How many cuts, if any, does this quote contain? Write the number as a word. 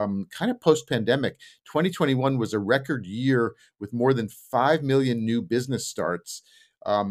zero